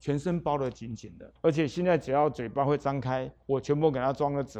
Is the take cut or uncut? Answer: cut